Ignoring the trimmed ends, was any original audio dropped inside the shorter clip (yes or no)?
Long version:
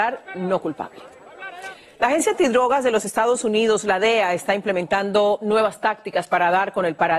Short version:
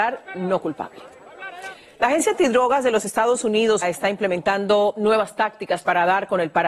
yes